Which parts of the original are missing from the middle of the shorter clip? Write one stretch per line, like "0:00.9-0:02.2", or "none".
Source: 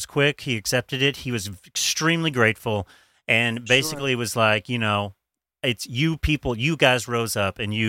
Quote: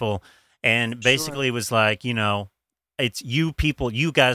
none